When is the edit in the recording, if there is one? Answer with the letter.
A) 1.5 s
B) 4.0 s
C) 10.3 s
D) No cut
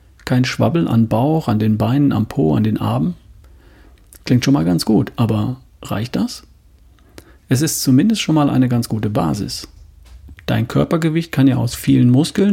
C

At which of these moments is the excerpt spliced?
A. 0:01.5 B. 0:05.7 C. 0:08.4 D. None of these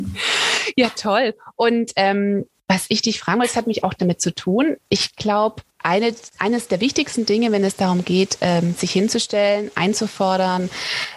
B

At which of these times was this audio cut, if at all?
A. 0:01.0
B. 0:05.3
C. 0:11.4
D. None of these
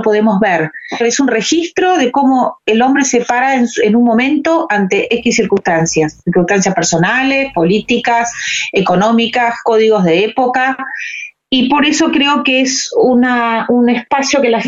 A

